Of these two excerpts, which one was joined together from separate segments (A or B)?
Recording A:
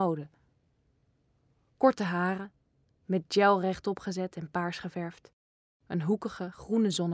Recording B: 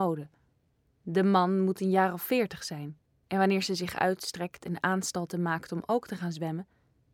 B